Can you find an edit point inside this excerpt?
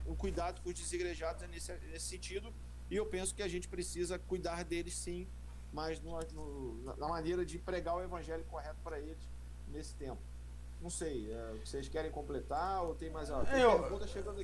no; 0 cuts

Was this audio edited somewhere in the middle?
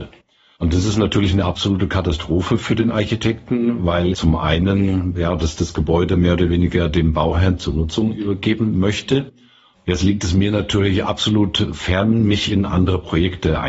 yes; 2 cuts; at 4.1 s, 9.7 s

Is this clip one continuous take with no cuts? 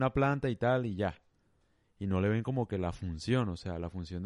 yes; 0 cuts

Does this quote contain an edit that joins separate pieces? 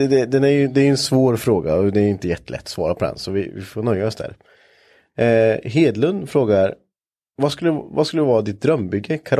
no; 0 cuts

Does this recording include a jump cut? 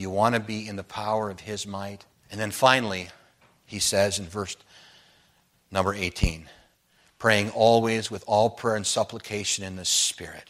yes; 1 cut; at 2.1 s

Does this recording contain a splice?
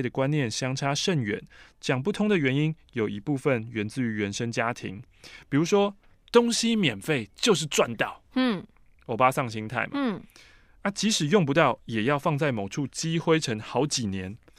no; 0 cuts

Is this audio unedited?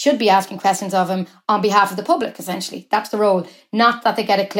yes; 0 cuts

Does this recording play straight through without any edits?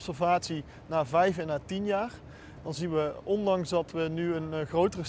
no; 1 cut; at 2.6 s

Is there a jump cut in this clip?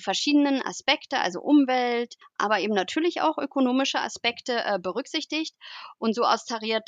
yes; 1 cut; at 2.2 s

